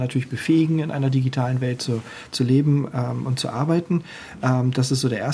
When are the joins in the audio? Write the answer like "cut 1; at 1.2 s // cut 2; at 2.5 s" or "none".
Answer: none